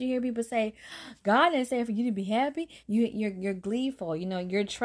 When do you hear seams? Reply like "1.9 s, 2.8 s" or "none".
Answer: 2.8 s